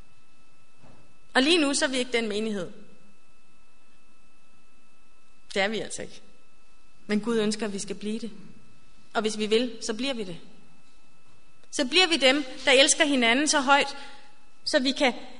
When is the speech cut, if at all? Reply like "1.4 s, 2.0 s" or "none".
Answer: none

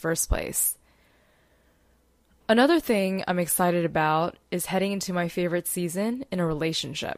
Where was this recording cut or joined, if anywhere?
none

